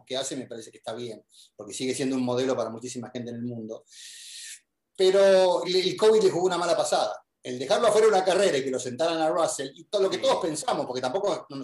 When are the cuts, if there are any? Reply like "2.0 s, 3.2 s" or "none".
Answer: 5.6 s